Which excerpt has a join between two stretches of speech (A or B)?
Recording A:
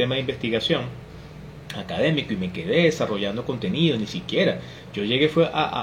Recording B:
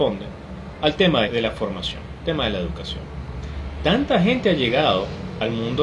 B